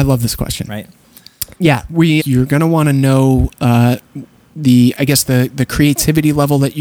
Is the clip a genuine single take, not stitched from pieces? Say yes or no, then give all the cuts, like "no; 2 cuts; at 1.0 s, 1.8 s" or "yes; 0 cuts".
no; 2 cuts; at 2.2 s, 4.9 s